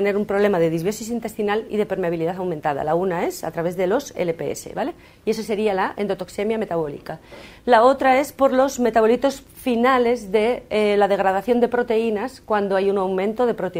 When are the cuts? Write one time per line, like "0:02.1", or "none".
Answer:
none